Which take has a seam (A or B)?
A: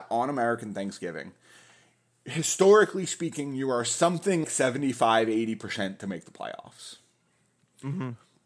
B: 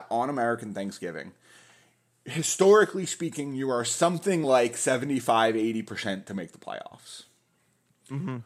A